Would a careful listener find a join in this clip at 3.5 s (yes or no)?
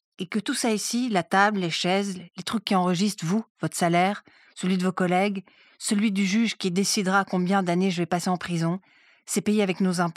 no